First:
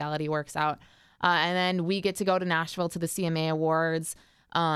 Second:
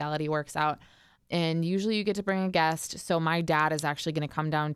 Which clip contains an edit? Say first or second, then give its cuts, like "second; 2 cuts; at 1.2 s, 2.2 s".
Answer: second; 1 cut; at 1.2 s